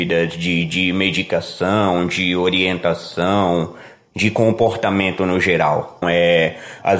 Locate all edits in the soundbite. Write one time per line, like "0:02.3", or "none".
0:06.0